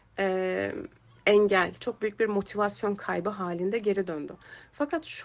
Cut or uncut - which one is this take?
uncut